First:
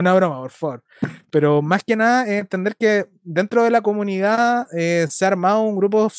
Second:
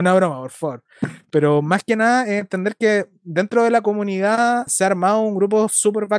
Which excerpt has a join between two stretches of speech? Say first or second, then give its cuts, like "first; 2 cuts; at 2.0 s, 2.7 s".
second; 1 cut; at 4.7 s